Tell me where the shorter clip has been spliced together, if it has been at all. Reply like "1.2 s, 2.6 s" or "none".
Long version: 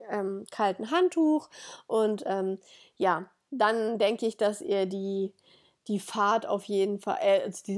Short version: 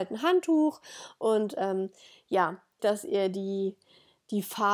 2.8 s